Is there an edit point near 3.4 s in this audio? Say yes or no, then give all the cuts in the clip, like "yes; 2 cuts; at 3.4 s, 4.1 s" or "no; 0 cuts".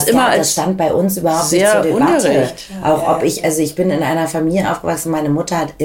no; 0 cuts